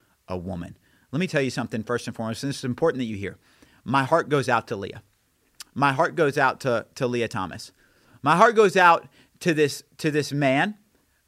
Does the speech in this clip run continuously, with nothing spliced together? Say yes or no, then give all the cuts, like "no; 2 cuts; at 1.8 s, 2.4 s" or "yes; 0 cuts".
yes; 0 cuts